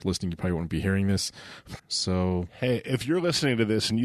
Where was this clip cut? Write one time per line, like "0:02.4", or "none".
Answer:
0:01.8